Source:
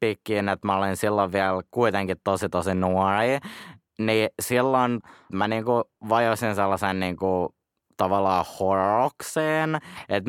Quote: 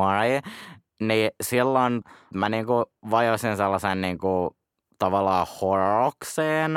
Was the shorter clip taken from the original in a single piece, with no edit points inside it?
yes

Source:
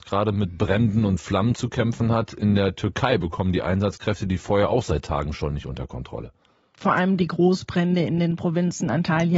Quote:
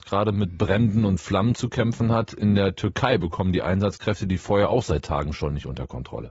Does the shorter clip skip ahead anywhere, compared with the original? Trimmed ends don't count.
no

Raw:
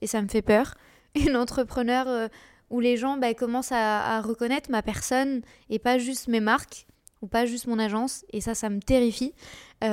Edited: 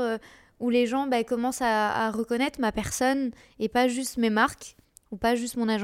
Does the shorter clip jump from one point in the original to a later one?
no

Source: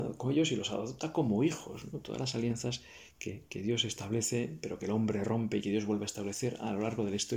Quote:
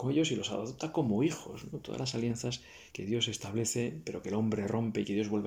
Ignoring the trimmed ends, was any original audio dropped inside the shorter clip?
yes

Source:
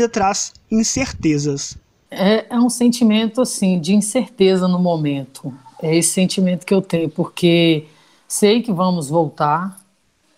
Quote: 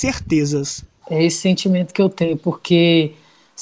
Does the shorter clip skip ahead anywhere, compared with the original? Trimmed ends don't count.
yes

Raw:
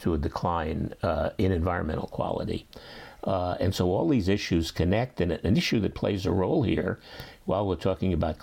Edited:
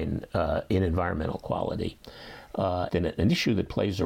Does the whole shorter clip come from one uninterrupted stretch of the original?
no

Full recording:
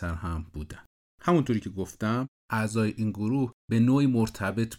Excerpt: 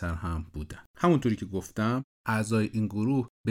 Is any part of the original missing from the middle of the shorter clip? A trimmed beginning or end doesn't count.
yes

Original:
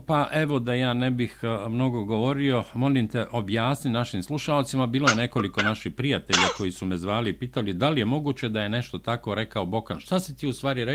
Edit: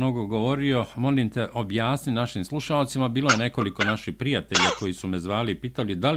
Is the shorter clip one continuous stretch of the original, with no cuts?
yes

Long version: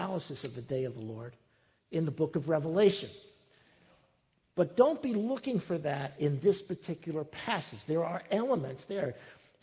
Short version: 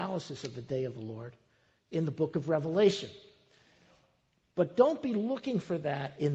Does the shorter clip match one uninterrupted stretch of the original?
yes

